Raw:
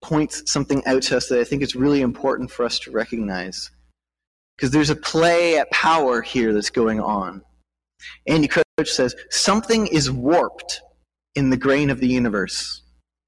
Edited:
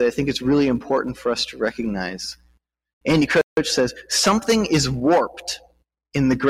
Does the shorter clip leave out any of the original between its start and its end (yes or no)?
yes